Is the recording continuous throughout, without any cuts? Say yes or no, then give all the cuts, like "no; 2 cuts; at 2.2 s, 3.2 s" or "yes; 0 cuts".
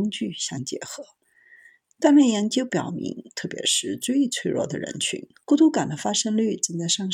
no; 2 cuts; at 3.3 s, 5.3 s